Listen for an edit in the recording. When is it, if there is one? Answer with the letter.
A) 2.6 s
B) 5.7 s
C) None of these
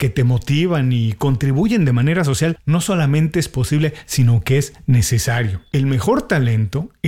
B